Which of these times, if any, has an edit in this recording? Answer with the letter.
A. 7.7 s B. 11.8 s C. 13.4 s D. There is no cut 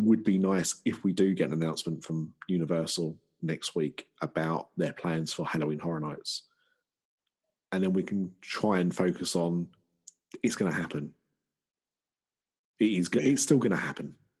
D